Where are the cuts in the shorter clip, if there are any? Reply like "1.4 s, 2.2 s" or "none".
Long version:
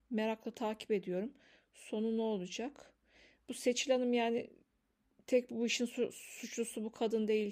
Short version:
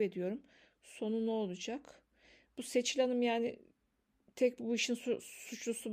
none